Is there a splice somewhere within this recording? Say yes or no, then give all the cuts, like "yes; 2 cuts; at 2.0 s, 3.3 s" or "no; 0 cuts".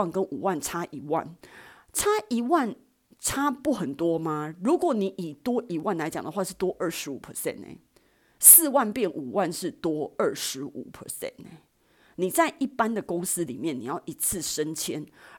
no; 0 cuts